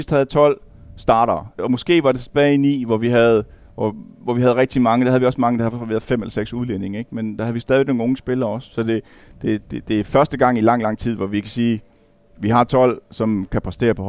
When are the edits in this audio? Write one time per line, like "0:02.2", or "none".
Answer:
0:01.6